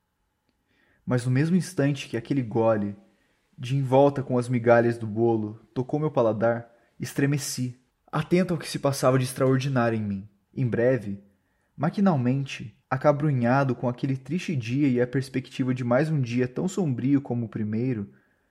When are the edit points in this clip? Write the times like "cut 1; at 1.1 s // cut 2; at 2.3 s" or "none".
cut 1; at 10.5 s // cut 2; at 12.8 s